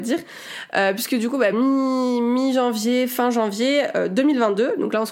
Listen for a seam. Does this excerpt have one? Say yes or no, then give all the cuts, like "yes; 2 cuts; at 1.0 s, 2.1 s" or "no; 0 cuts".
no; 0 cuts